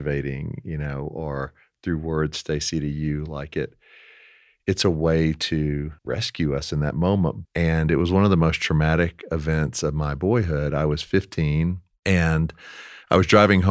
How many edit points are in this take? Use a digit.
2